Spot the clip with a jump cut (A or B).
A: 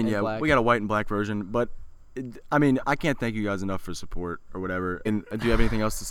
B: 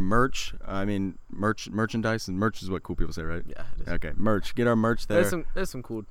A